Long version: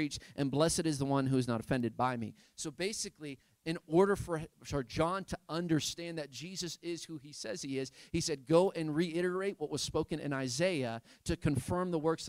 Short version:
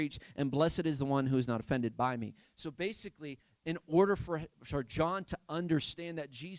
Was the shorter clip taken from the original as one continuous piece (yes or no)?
yes